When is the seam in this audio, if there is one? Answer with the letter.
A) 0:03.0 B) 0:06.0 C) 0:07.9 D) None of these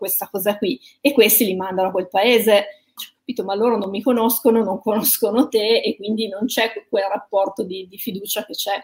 A